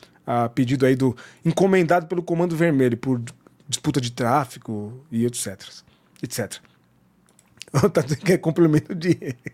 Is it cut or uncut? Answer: uncut